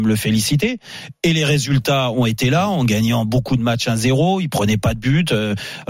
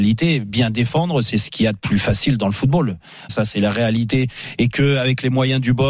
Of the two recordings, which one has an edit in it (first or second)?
second